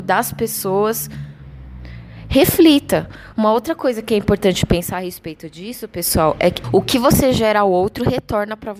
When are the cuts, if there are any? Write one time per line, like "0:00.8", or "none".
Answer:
0:03.3
0:06.6